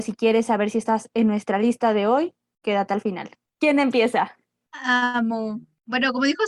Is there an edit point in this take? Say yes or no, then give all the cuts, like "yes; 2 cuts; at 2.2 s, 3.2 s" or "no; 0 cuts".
no; 0 cuts